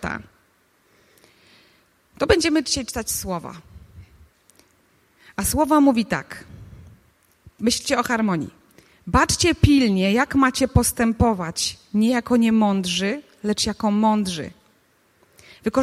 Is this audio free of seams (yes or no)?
yes